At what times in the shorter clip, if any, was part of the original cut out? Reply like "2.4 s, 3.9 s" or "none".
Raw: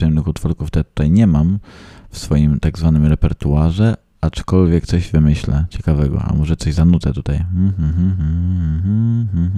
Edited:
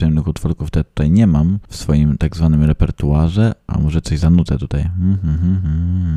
1.7 s, 3.7 s

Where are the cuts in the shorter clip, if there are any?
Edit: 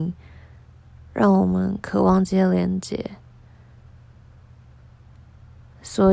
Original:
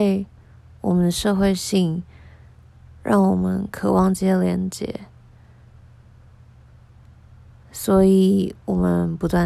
none

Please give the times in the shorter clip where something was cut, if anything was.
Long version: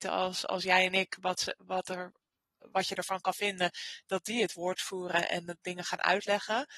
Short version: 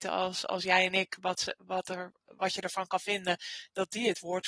2.2 s

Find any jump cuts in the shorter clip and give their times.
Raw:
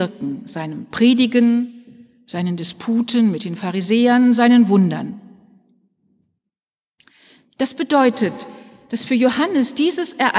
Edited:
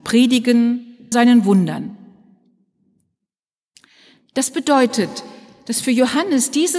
1.1 s

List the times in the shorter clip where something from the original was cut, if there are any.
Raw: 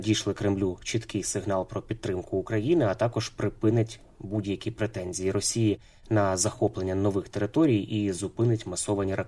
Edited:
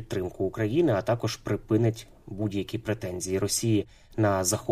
none

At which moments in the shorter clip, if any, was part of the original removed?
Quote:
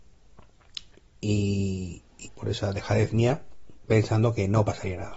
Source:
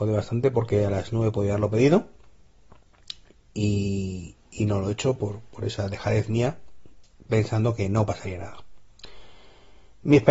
2.3 s, 3.8 s

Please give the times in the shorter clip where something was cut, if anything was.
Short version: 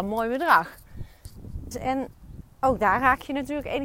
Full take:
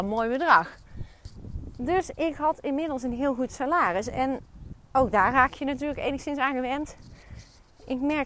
1.7 s

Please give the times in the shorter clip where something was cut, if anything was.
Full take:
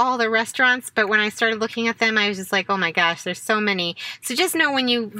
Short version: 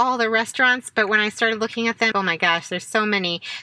2.1 s

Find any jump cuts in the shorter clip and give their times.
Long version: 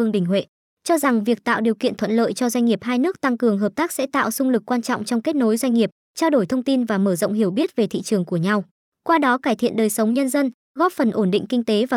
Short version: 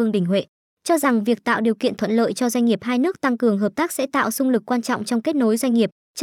none

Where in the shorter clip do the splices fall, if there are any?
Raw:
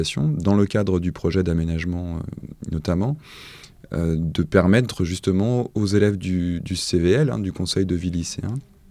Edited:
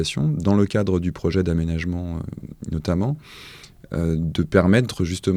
none

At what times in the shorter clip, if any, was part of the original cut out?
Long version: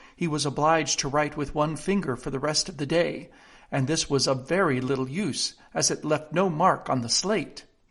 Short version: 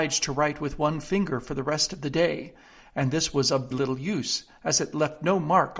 3.7 s

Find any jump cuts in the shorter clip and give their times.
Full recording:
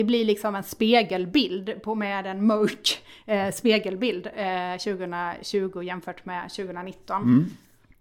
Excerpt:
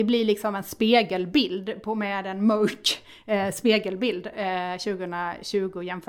none

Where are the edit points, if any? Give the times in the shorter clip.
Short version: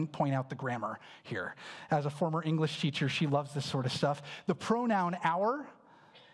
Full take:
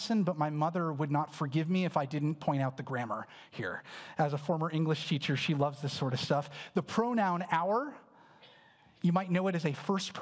none

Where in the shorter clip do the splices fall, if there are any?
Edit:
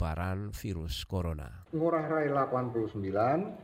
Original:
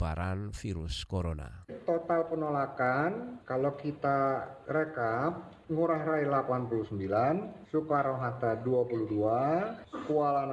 1.7 s

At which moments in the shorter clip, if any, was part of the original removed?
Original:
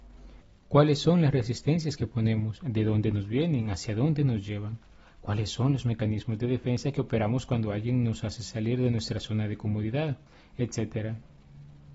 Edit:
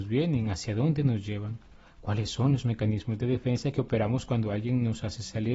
none

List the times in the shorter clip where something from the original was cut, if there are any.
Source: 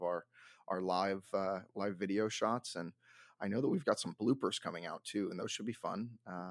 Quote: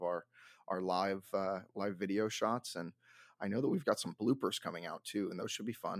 none

